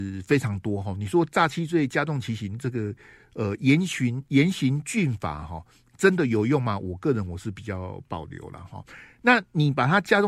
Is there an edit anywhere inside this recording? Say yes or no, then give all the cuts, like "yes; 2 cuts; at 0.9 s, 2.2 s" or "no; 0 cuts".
no; 0 cuts